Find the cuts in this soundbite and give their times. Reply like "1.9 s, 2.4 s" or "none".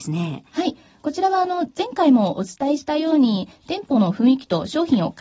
none